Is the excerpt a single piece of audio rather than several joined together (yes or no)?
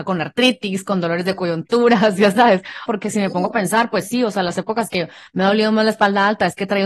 no